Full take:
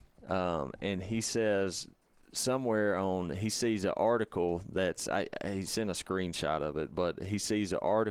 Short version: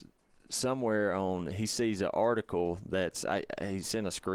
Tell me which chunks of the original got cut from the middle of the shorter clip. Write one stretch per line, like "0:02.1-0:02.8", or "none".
none

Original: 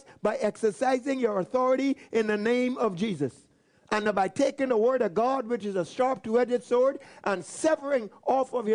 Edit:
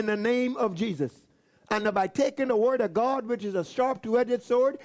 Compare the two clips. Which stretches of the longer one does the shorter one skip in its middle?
none

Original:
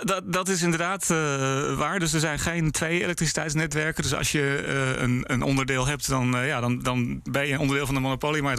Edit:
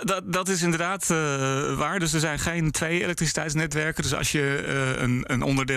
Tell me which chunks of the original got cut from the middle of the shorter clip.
none

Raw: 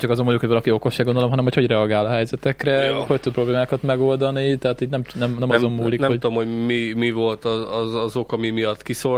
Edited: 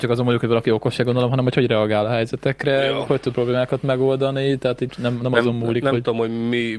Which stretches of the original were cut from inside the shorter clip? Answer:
0:04.9-0:05.1

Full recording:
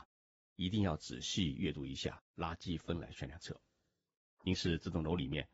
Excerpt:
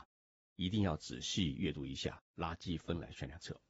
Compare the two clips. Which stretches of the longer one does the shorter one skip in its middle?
none

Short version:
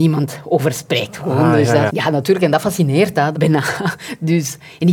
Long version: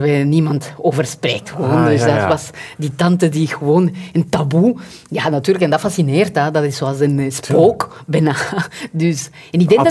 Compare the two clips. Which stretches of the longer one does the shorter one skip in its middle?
0:02.2-0:05.1
0:06.5-0:08.1

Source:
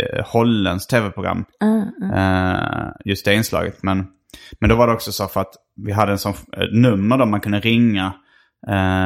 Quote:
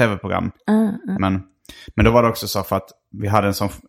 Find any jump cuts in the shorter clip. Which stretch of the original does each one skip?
0:02.1-0:03.8

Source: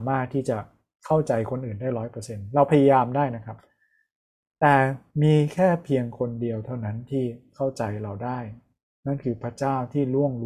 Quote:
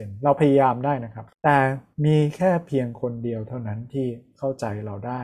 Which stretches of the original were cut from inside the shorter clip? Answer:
0:03.6-0:04.5

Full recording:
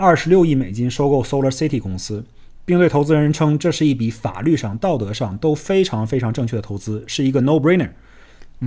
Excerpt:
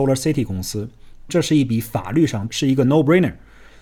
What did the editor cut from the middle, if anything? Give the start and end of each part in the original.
0:02.6-0:03.6
0:04.8-0:07.1

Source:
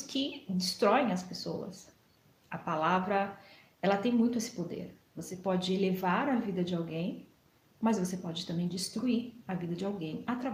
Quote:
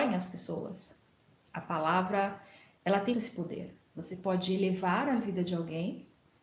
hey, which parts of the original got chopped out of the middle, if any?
0:04.1-0:04.3

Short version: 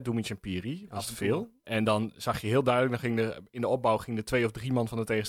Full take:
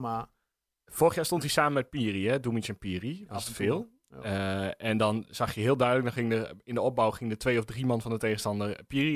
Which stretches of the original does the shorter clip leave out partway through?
0:04.0-0:04.8

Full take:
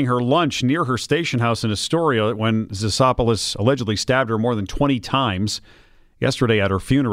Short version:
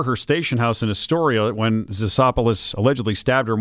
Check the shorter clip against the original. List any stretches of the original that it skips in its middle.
none

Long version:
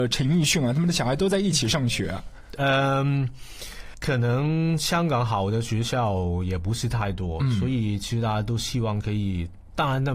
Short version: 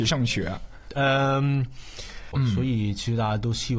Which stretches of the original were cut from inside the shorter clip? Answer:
0:04.0-0:07.4

